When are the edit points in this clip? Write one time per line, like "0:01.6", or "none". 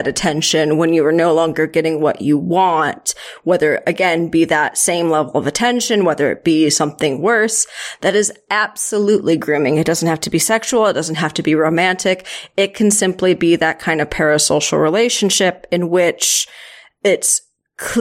none